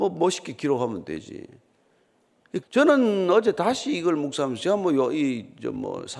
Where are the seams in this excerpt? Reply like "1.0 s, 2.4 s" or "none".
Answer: 2.6 s